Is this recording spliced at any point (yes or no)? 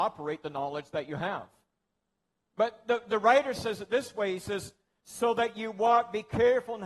no